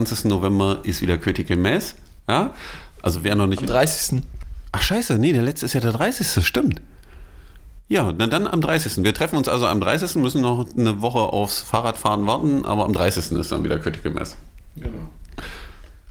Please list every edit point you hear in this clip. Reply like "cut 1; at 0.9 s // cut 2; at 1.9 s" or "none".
none